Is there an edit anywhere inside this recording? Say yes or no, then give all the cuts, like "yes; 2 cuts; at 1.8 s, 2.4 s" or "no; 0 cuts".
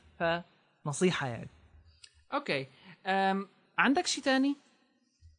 yes; 1 cut; at 3.7 s